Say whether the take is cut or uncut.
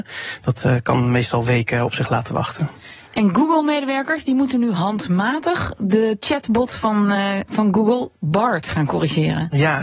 uncut